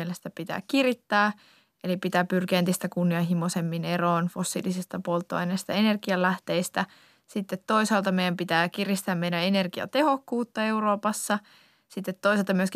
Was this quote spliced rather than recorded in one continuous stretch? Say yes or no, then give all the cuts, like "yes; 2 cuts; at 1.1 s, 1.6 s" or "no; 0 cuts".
no; 0 cuts